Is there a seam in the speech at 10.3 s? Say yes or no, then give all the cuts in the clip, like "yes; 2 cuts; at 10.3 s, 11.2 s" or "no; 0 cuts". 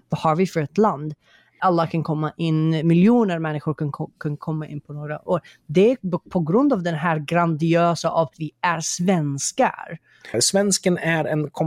yes; 2 cuts; at 8.3 s, 10.3 s